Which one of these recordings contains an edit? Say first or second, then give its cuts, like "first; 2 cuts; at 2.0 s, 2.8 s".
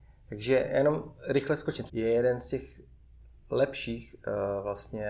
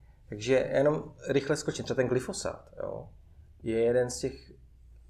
first; 1 cut; at 1.9 s